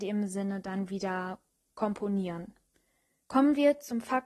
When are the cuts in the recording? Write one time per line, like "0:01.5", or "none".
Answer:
0:03.2